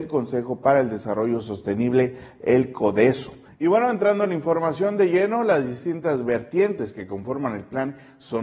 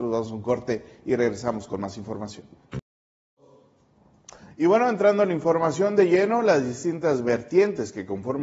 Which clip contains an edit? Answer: first; 1 cut; at 3.5 s

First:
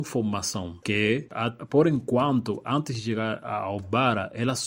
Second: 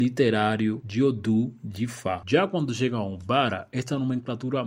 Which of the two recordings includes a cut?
second; 1 cut; at 2.2 s

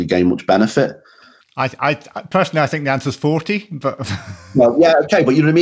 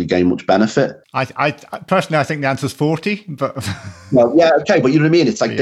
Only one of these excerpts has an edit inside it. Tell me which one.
second; 1 cut; at 1.0 s

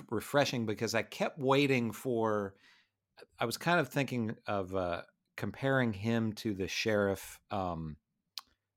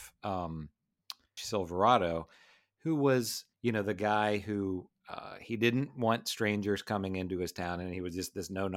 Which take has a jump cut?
second; 2 cuts; at 1.4 s, 3.5 s

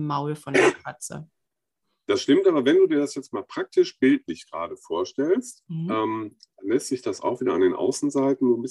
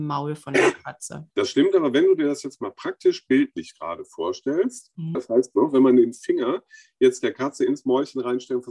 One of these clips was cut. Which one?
second; 2 cuts; at 1.3 s, 5.1 s

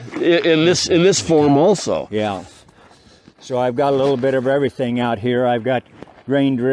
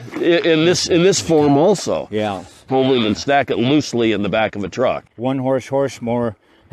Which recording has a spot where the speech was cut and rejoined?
second; 2 cuts; at 2.7 s, 5.1 s

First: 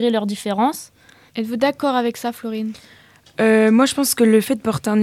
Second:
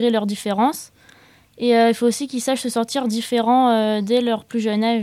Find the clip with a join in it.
first; 1 cut; at 1.3 s

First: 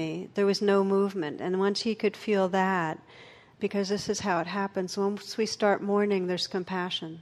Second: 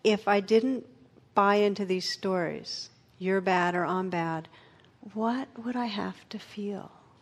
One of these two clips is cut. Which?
first; 1 cut; at 3.6 s

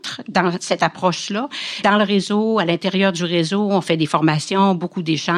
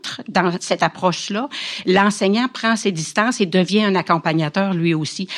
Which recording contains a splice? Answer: first; 1 cut; at 1.8 s

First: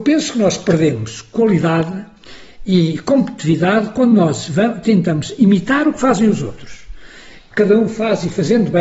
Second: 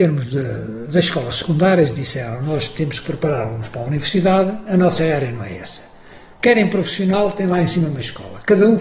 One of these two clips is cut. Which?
first; 1 cut; at 7.5 s

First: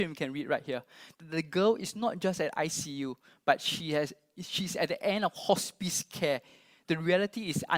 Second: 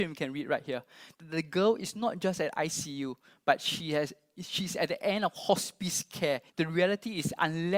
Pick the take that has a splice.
second; 1 cut; at 6.5 s

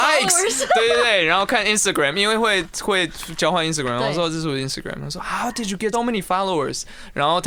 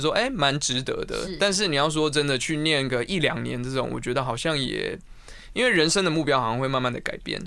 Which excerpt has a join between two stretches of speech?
first; 1 cut; at 5.9 s

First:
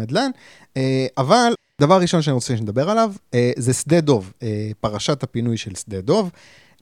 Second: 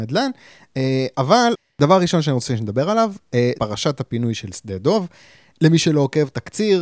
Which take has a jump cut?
second; 1 cut; at 3.5 s

